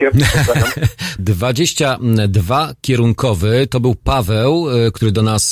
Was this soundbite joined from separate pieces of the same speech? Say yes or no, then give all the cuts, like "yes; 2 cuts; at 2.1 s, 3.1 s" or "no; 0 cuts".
yes; 1 cut; at 1.2 s